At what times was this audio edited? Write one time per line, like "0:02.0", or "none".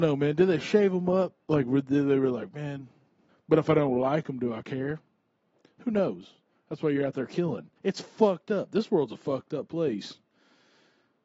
0:03.3
0:07.8